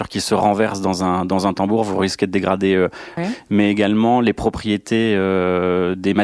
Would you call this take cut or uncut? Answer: cut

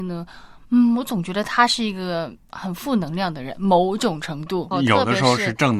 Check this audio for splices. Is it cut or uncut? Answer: cut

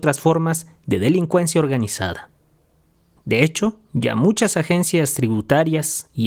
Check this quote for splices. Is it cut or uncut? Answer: cut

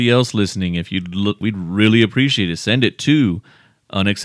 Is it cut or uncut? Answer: cut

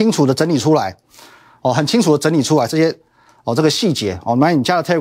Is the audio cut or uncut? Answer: uncut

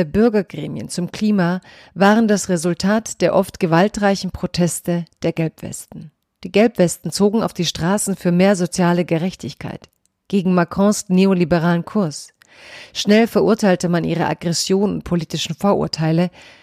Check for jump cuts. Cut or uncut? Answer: uncut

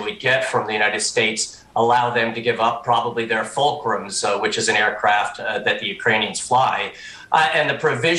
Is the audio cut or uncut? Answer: uncut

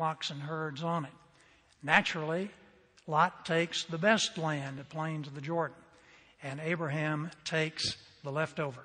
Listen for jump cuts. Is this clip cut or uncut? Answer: cut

